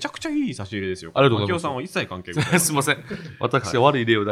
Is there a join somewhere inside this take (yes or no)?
no